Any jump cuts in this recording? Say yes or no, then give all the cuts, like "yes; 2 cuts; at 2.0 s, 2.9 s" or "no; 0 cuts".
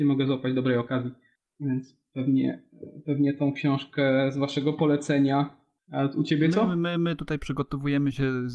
no; 0 cuts